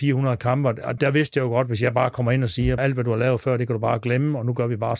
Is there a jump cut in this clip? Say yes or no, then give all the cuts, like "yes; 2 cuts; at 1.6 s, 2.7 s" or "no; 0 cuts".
yes; 2 cuts; at 1.0 s, 2.8 s